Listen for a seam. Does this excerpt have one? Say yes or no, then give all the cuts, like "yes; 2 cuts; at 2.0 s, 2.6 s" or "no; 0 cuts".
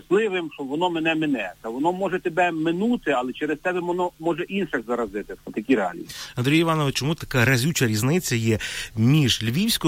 yes; 2 cuts; at 5.4 s, 6.9 s